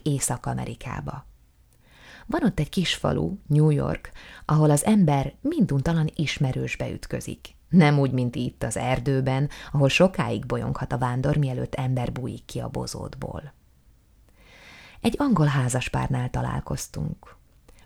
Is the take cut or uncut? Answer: uncut